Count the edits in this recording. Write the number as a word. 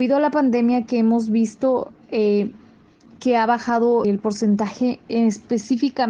one